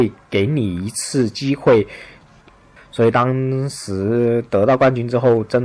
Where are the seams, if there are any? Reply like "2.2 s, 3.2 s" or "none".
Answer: 2.8 s

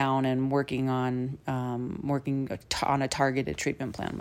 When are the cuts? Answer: none

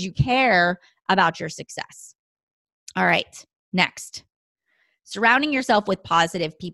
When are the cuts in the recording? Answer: none

